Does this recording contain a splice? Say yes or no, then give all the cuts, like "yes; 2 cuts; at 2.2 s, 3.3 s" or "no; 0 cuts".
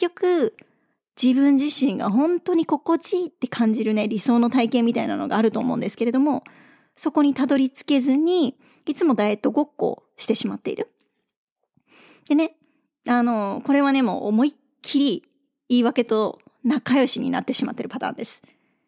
no; 0 cuts